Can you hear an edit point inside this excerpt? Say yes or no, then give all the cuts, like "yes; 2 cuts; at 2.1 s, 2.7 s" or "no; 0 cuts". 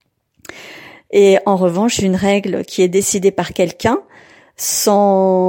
yes; 1 cut; at 1.1 s